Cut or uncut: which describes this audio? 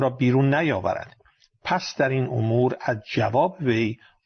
uncut